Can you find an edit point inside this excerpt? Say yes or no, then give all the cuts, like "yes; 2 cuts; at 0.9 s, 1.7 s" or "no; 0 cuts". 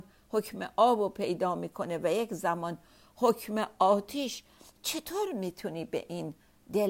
no; 0 cuts